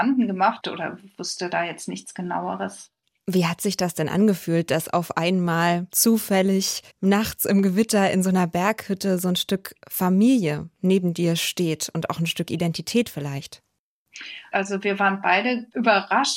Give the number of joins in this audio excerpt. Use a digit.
2